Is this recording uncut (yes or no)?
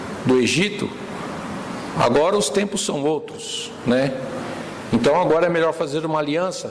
yes